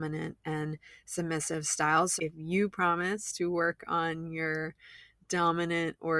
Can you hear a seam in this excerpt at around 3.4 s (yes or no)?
no